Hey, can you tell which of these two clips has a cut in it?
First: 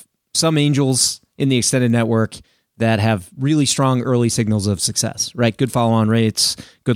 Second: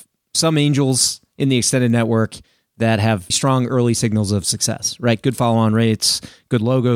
second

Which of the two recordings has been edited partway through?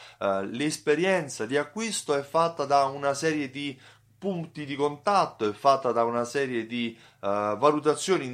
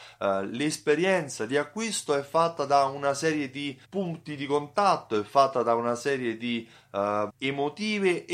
second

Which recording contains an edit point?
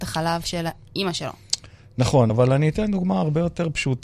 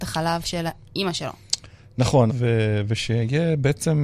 second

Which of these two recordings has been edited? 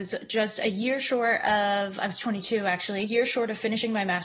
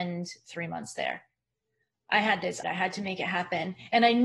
second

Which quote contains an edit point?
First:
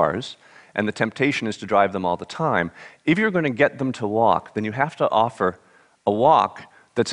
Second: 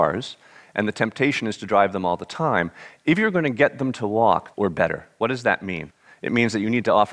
second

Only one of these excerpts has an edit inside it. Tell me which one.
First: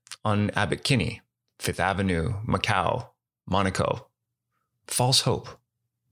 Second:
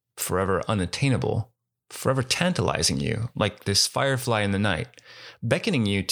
first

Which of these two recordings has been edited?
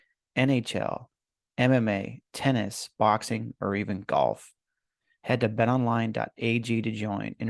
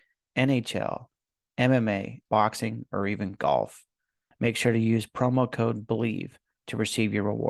second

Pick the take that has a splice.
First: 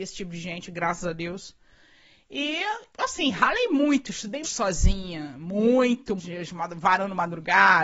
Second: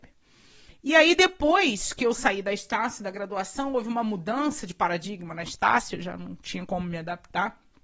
first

